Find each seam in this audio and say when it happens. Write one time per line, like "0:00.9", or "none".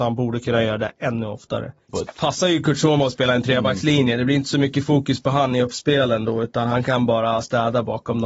0:01.9

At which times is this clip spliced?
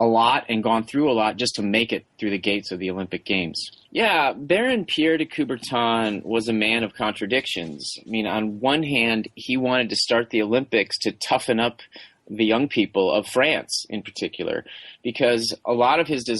0:03.9

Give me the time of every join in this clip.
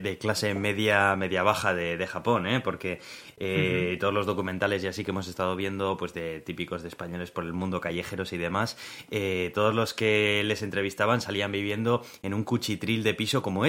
none

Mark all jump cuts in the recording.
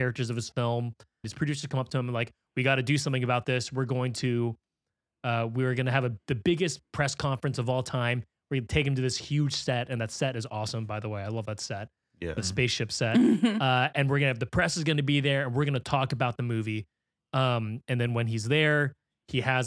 0:01.2

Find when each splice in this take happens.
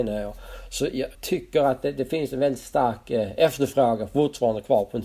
0:01.1

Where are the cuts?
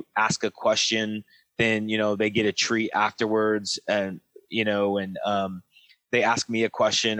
none

